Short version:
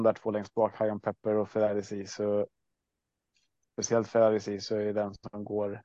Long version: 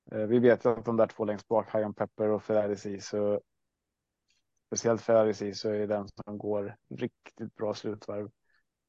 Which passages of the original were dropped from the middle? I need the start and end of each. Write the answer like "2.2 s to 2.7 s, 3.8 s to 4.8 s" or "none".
none